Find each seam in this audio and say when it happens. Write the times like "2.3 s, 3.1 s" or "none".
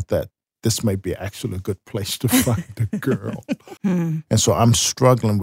3.8 s